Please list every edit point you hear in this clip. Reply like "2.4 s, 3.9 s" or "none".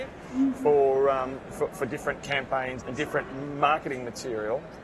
2.8 s